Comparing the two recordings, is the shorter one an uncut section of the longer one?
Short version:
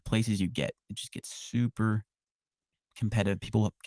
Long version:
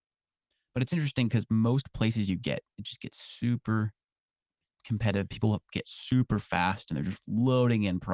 yes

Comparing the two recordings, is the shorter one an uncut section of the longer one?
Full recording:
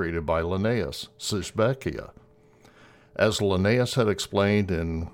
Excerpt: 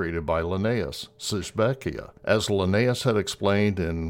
no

